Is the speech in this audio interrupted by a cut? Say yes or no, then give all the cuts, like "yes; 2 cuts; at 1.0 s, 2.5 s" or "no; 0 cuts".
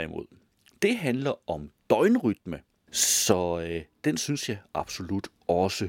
yes; 1 cut; at 2.9 s